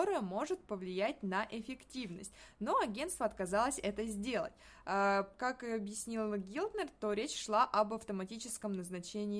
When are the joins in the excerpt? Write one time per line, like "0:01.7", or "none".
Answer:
none